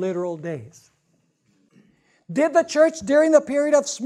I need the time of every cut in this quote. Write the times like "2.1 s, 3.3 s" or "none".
1.7 s